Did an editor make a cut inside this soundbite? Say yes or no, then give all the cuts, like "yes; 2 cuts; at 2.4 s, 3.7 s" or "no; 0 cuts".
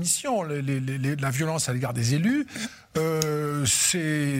no; 0 cuts